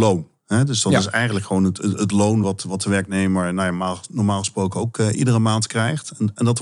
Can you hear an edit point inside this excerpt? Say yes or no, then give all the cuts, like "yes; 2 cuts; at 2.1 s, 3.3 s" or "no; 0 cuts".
no; 0 cuts